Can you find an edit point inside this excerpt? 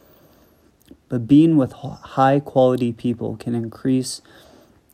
no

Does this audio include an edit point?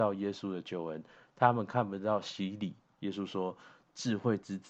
yes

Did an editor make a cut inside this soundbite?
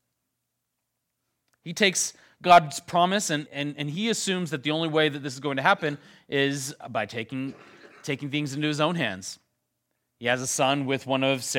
yes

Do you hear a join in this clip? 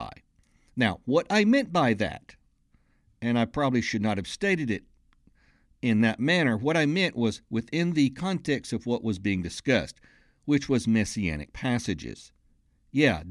no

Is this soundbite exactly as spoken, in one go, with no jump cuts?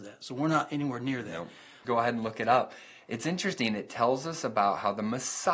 no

